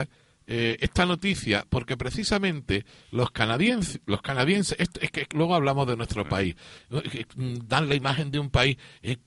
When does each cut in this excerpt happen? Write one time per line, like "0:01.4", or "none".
0:05.3
0:06.8